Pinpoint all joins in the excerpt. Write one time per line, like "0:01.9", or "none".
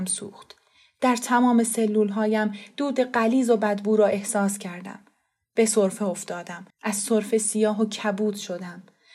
0:06.7

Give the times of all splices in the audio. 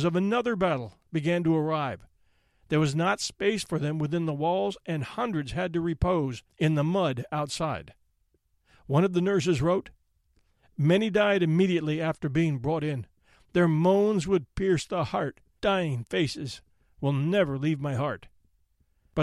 0:06.5
0:15.6

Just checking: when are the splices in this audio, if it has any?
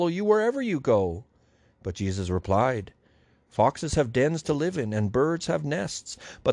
none

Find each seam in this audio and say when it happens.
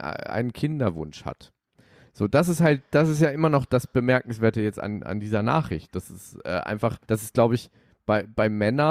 0:07.0

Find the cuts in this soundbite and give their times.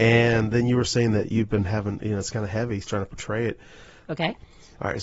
0:02.8
0:04.0

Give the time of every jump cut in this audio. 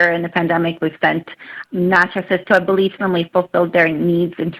0:01.6
0:03.0

